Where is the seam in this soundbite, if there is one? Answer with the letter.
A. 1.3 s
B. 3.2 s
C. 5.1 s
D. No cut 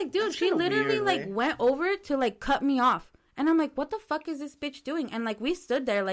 D